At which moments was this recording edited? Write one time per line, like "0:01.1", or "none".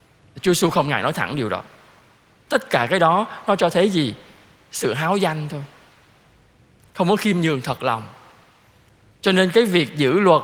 0:02.5

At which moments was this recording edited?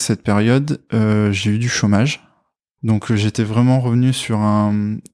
0:02.8

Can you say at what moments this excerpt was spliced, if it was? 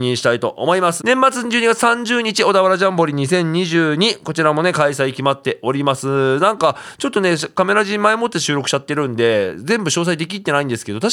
0:01.0

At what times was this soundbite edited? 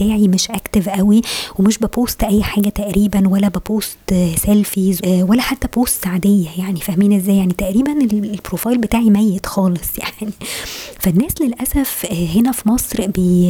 0:05.0

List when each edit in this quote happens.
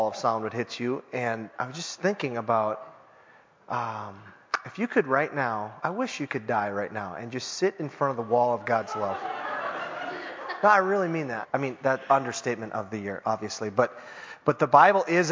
0:05.8
0:11.4

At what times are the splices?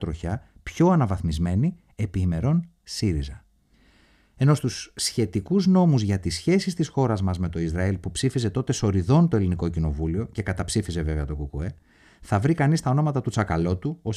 none

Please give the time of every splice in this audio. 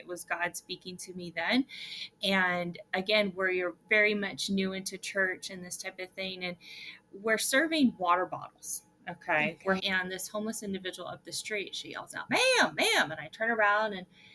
0:09.8
0:12.3

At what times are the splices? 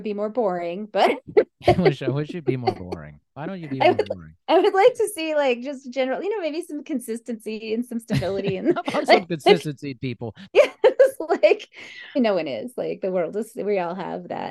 0:04.4
0:10.5
0:12.2

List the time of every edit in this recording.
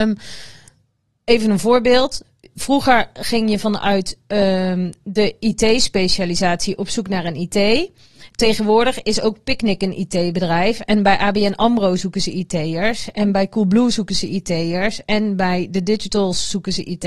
none

